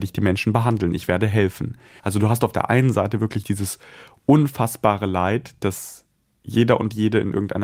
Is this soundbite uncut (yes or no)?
no